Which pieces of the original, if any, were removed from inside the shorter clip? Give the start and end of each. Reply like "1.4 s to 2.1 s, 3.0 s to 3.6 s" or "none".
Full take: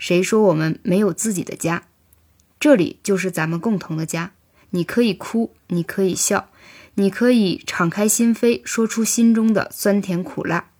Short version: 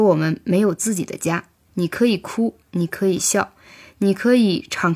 2.1 s to 4.6 s